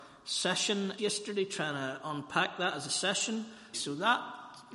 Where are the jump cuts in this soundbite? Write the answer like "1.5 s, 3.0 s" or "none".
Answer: 1.0 s, 3.7 s